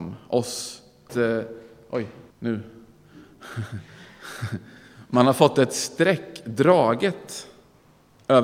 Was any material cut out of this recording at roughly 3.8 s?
no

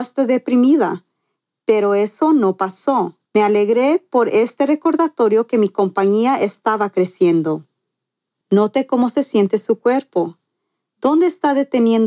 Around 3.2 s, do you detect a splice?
yes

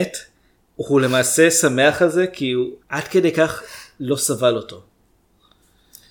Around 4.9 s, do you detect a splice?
no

